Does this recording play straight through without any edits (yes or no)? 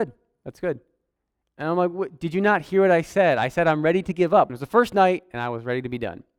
no